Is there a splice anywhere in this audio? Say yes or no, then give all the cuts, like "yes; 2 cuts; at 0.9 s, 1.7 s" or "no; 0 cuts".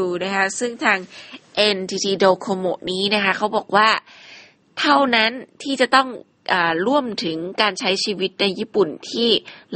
no; 0 cuts